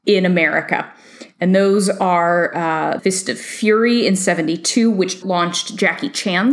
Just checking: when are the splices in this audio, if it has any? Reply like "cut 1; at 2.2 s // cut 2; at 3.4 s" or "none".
cut 1; at 3.0 s // cut 2; at 5.2 s